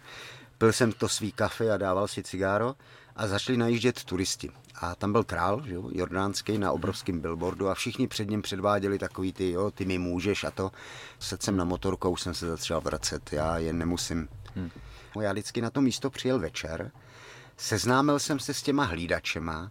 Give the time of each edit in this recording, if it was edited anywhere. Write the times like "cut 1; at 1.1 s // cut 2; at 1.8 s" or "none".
cut 1; at 11.2 s // cut 2; at 15.2 s

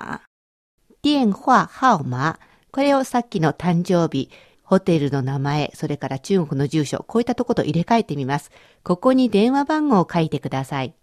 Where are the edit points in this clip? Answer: none

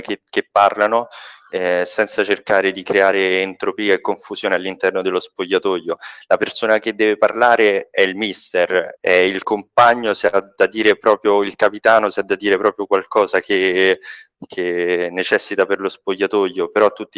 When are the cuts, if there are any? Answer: cut 1; at 9.0 s

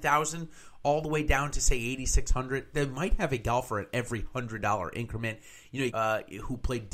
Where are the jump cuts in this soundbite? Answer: cut 1; at 5.9 s

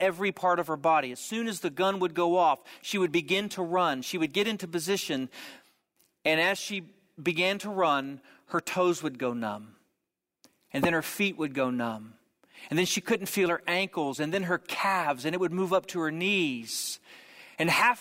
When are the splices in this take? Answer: none

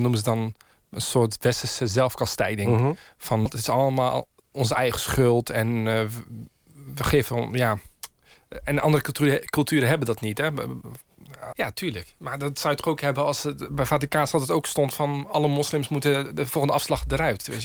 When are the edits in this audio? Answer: cut 1; at 3.5 s // cut 2; at 11.5 s

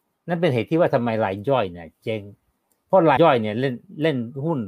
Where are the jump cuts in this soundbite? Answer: cut 1; at 3.2 s

